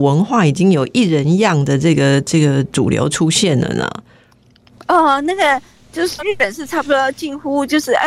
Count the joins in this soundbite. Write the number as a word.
one